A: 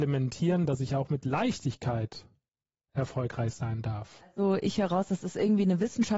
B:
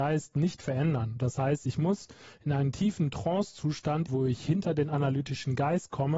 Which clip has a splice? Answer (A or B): B